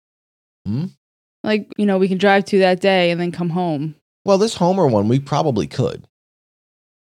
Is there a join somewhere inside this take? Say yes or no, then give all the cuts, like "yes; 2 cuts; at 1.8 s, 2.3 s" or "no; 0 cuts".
yes; 1 cut; at 1.7 s